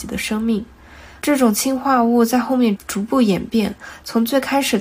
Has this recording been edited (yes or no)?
yes